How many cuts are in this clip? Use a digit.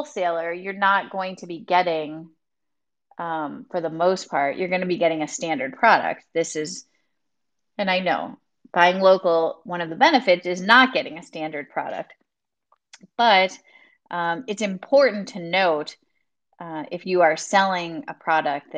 0